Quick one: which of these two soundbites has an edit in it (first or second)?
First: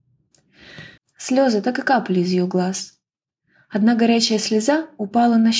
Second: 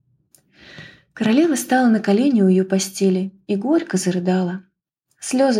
first